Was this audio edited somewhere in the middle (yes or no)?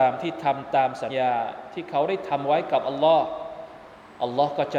yes